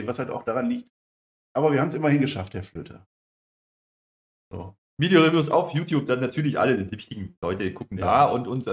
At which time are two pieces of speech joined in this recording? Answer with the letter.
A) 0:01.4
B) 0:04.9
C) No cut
B